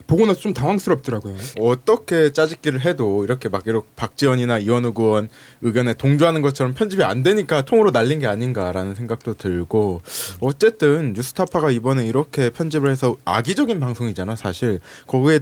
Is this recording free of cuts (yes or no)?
no